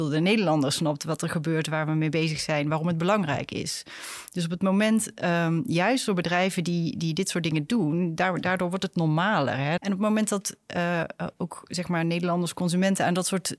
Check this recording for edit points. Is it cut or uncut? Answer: cut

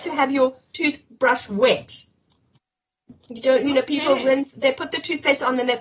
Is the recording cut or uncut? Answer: uncut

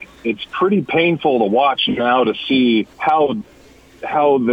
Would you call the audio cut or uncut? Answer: cut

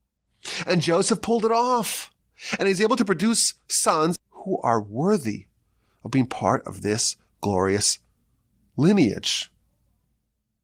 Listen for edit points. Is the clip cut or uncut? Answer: cut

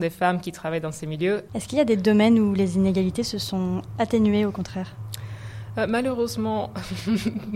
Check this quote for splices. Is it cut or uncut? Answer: cut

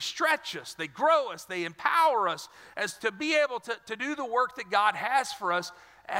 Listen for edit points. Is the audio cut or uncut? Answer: cut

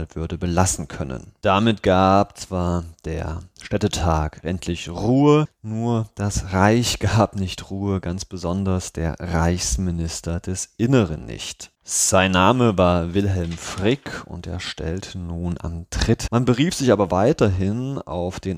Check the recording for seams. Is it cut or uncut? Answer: cut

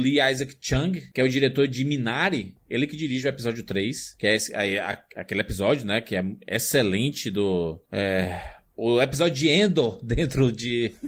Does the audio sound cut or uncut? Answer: uncut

